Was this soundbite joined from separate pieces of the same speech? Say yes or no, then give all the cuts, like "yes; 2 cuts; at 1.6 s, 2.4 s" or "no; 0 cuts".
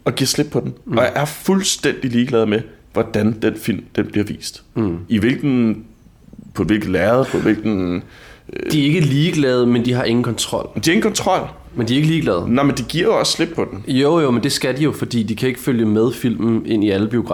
no; 0 cuts